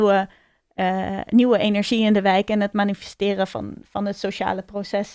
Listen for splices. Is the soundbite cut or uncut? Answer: uncut